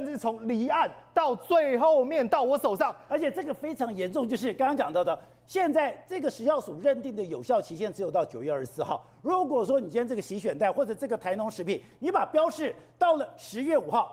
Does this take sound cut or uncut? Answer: cut